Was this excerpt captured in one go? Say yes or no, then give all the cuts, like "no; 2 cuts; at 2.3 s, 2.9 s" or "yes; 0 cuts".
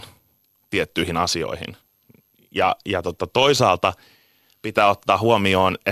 yes; 0 cuts